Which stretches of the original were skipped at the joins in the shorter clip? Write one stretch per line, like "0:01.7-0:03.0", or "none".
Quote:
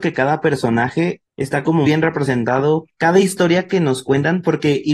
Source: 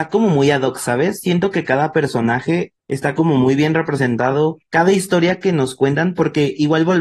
0:03.4-0:03.6

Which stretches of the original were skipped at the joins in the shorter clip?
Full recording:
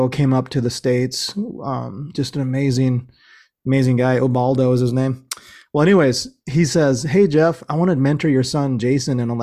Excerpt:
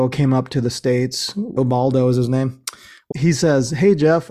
0:01.6-0:04.2
0:05.7-0:06.4

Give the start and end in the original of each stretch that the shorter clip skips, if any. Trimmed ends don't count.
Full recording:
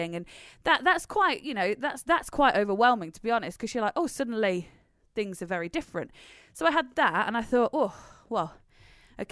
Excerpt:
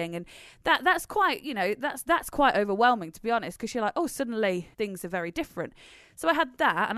0:04.7-0:05.1

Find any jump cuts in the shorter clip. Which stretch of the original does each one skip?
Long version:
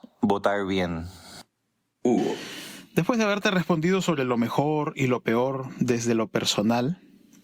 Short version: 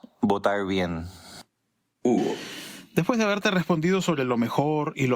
none

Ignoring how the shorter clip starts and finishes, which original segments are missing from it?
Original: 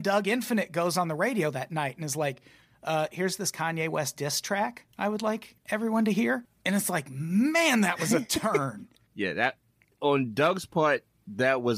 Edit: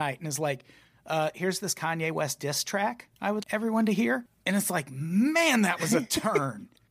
0:05.2-0:05.6

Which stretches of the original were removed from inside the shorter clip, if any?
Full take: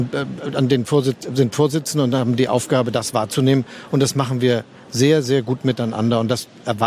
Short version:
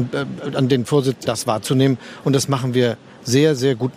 0:01.3-0:02.9

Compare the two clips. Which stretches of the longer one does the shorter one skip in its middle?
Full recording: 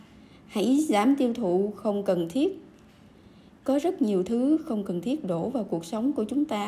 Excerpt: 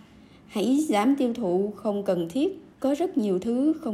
0:02.7-0:03.6

